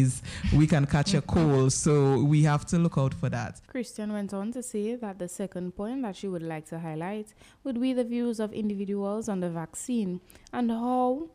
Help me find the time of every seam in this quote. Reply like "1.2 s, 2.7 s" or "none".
3.6 s